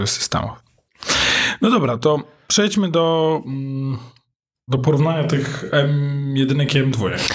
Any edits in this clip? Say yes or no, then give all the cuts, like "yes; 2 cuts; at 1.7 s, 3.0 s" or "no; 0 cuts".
yes; 1 cut; at 4.7 s